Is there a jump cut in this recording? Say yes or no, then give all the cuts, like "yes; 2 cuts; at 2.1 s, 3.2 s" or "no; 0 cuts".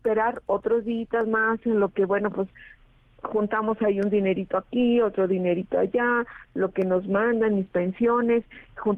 no; 0 cuts